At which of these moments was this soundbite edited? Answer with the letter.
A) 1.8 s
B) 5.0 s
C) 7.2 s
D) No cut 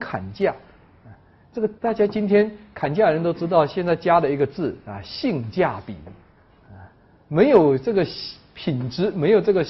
A